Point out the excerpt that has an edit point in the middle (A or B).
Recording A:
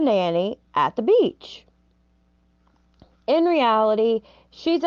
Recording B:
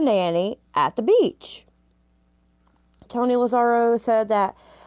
B